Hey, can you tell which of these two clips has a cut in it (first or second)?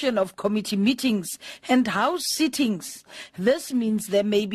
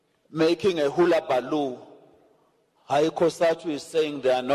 first